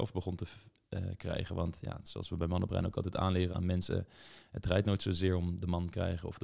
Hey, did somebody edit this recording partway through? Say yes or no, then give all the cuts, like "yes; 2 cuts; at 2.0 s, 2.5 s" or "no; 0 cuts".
yes; 1 cut; at 3.5 s